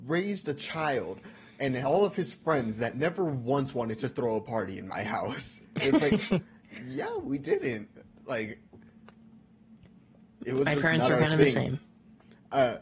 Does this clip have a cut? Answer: no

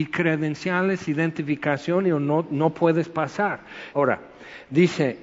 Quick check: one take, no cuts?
no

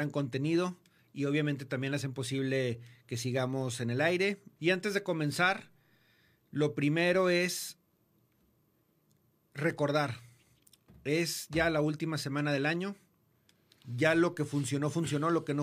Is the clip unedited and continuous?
no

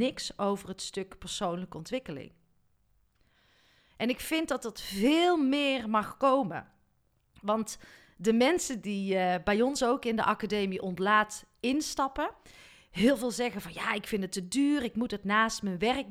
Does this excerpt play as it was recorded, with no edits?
yes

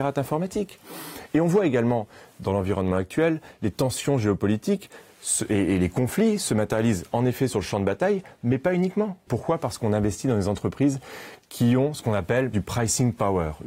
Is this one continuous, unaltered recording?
no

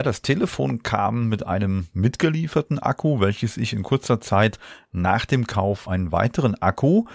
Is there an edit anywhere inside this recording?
yes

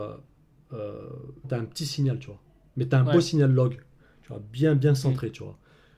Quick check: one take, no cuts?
no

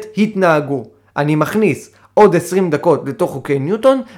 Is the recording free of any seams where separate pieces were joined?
yes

